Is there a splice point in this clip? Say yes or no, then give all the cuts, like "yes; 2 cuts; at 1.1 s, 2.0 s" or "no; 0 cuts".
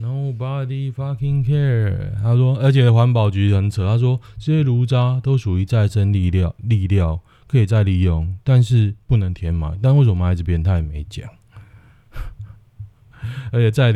no; 0 cuts